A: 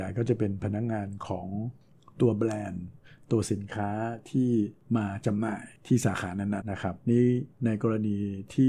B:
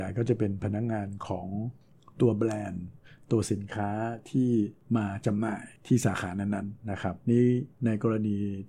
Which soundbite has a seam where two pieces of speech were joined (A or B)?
A